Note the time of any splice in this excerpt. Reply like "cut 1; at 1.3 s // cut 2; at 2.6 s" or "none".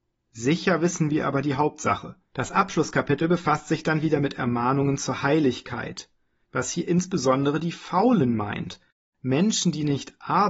cut 1; at 2.3 s // cut 2; at 6.4 s